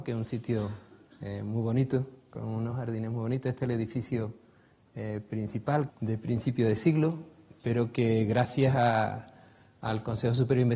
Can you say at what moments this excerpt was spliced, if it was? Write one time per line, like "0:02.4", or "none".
0:05.9